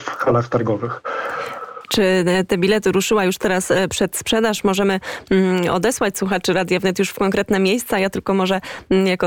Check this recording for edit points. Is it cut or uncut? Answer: uncut